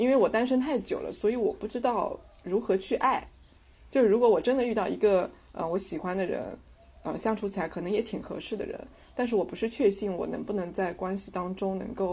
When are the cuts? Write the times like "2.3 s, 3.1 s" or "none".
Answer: none